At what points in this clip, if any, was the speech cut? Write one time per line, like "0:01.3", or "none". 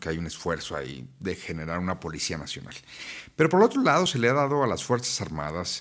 none